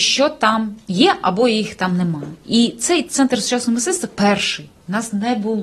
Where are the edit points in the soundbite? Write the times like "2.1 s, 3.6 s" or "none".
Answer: none